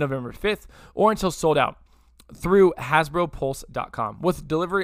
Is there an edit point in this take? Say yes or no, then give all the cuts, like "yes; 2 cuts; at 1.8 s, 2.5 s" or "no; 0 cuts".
no; 0 cuts